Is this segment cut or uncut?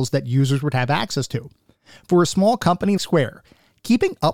cut